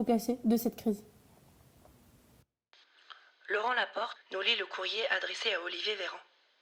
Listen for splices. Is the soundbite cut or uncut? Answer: cut